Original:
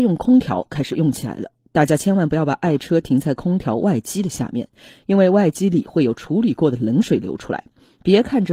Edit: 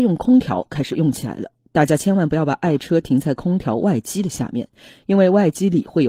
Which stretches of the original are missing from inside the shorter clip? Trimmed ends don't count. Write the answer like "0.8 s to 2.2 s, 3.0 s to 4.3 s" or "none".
none